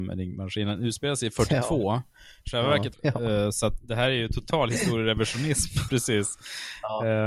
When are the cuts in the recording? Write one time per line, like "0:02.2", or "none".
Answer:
0:02.9
0:05.9